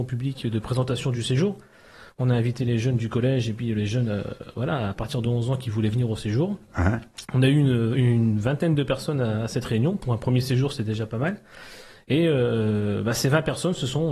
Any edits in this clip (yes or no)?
no